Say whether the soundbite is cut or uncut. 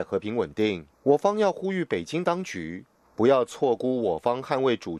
cut